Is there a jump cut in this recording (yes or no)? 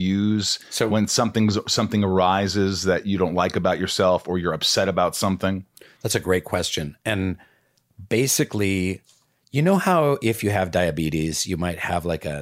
no